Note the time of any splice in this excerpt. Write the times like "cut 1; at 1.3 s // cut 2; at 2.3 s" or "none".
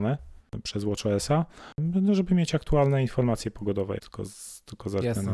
cut 1; at 4.0 s